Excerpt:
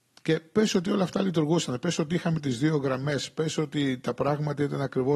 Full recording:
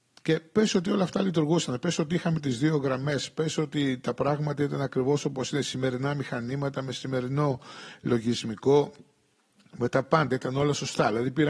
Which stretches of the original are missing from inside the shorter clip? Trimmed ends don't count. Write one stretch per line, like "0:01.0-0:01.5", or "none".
none